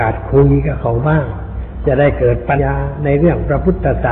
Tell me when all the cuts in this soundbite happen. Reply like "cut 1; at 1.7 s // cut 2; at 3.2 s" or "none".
cut 1; at 2.6 s

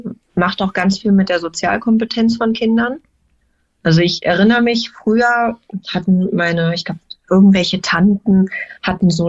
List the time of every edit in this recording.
none

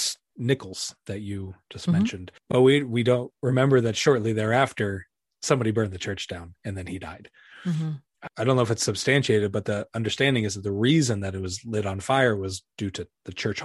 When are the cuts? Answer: none

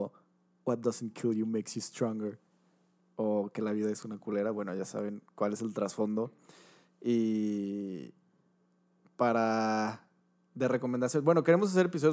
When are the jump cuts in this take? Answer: none

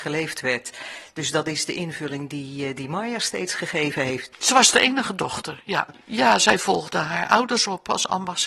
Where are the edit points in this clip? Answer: cut 1; at 4.3 s // cut 2; at 5.9 s

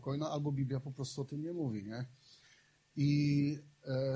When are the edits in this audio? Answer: none

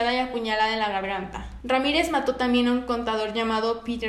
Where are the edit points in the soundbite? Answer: cut 1; at 1.6 s

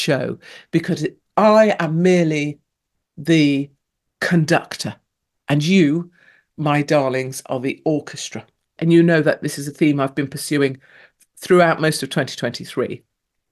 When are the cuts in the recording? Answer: cut 1; at 8.8 s

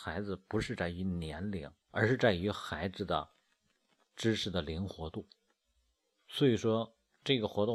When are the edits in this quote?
cut 1; at 1.8 s

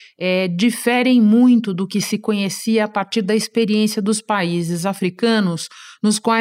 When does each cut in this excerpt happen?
none

